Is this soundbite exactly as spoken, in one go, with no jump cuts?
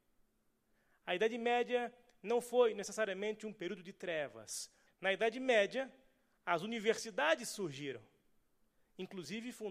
no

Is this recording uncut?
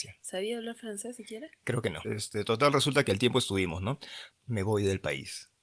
no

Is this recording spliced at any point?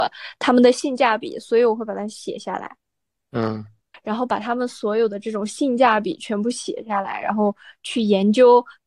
yes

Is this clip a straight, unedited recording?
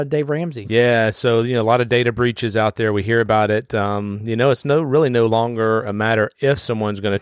yes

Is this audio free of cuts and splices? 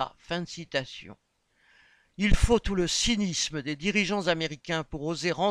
yes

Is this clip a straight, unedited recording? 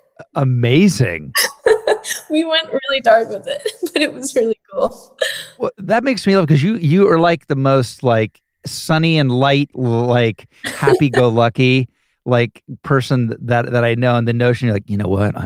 no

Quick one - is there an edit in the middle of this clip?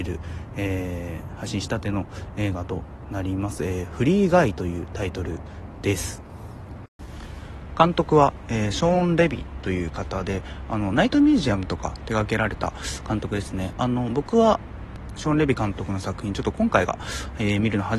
no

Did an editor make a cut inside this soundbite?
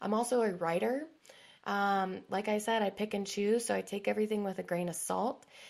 yes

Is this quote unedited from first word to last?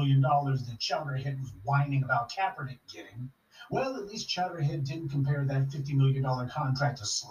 yes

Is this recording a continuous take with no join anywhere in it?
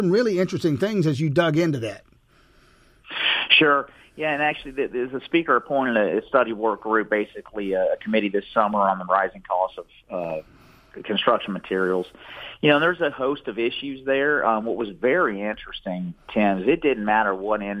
yes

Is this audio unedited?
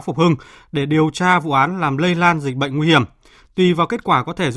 yes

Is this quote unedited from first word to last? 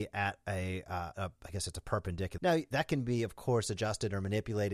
no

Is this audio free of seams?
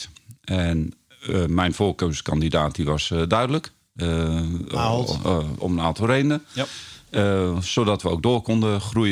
yes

